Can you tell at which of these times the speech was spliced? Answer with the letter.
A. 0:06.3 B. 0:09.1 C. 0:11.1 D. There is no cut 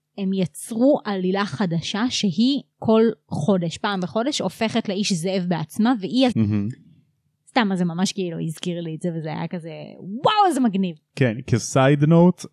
A